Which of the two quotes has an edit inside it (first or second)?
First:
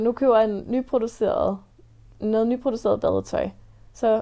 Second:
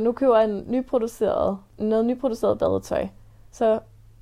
second